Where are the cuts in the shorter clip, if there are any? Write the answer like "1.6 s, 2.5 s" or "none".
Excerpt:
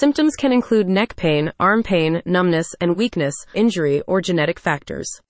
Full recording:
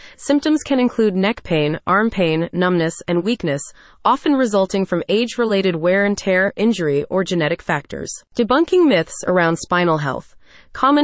3.5 s

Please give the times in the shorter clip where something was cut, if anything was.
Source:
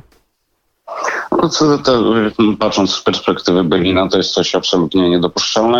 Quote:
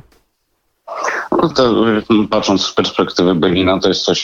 1.5 s

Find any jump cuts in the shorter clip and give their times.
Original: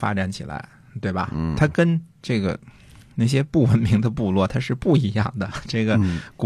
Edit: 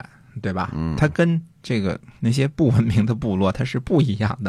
2.2 s

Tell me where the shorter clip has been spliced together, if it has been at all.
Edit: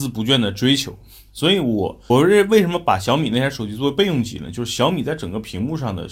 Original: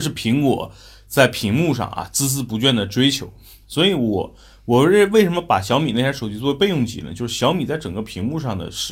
2.1 s

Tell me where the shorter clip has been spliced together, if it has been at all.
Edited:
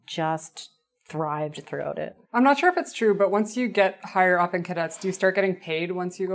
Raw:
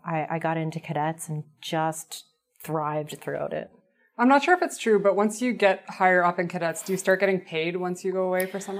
2.2 s

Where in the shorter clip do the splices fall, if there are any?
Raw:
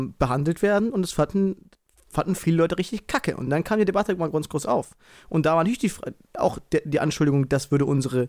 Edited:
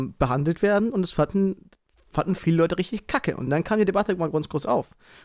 none

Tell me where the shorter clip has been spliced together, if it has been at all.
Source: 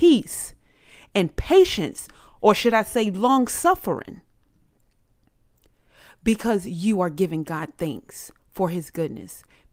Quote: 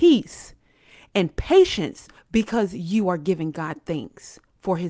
2.2 s

